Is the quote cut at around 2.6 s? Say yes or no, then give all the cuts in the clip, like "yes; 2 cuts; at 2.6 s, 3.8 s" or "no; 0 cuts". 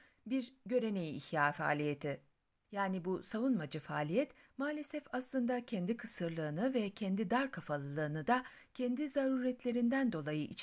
yes; 1 cut; at 2.6 s